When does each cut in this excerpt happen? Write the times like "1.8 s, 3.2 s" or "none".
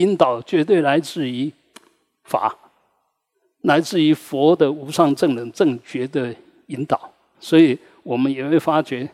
7.3 s